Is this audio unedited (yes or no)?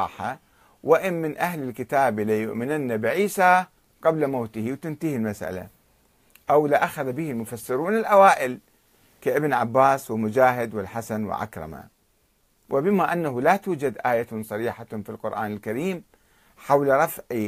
yes